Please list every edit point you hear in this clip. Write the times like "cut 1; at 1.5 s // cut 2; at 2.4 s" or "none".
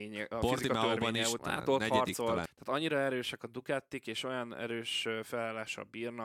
cut 1; at 1.4 s // cut 2; at 2.5 s